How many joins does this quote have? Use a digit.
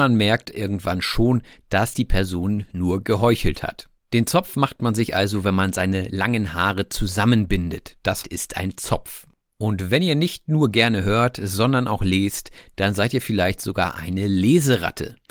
2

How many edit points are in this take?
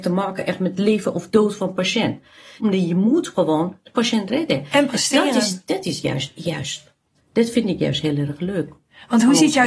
1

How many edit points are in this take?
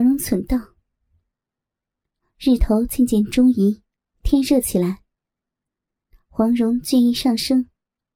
0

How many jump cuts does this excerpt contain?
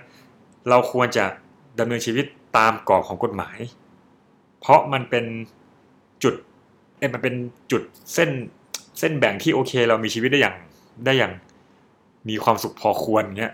0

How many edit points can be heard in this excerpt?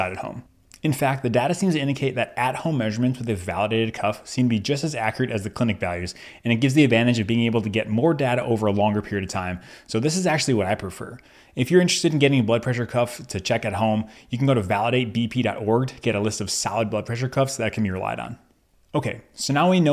0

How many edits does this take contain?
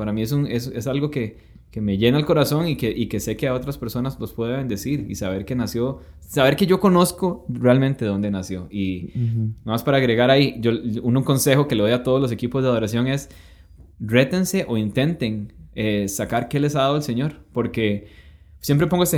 2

